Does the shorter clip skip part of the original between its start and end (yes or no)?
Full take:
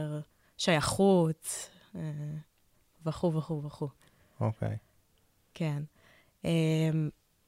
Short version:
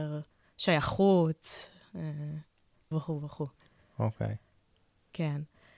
yes